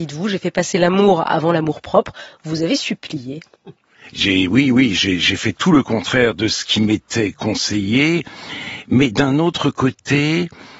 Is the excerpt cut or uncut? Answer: uncut